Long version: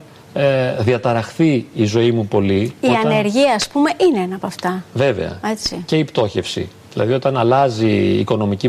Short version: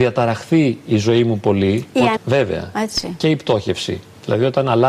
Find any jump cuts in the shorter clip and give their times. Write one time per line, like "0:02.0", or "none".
0:02.2